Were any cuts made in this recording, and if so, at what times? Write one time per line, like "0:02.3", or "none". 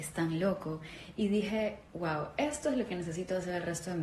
0:01.9

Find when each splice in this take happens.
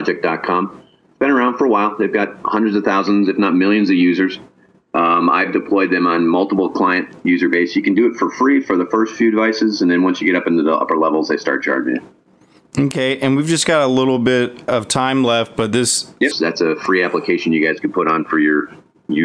0:16.3

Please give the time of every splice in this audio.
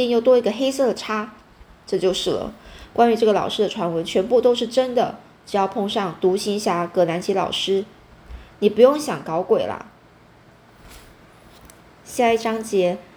none

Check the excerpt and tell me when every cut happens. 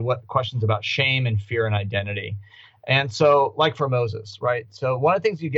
none

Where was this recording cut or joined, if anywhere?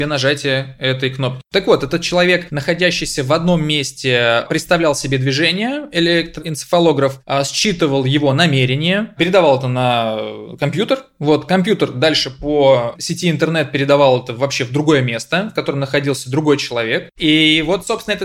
none

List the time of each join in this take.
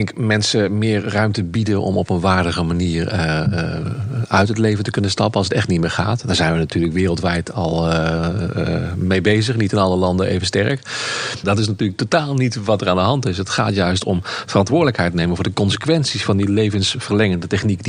0:11.4

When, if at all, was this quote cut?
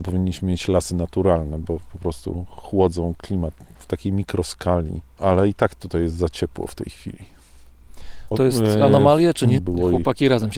0:08.3
0:09.6

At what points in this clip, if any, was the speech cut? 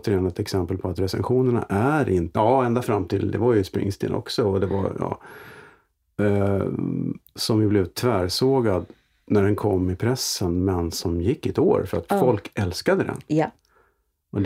0:02.3

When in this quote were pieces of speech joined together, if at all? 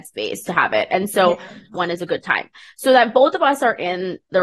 0:01.7

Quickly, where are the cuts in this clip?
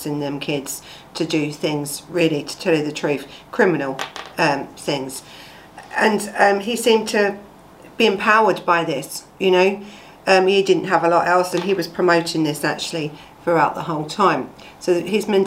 0:11.5

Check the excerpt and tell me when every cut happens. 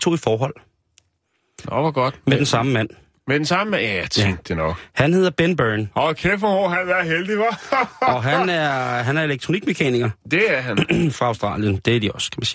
none

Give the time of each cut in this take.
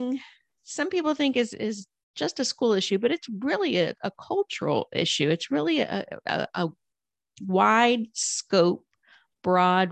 none

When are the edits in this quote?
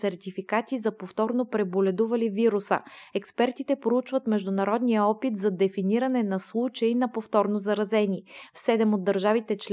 none

